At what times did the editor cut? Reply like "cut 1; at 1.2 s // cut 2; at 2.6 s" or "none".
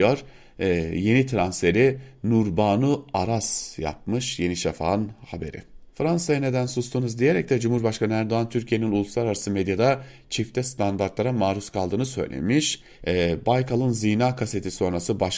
cut 1; at 5.9 s // cut 2; at 13.0 s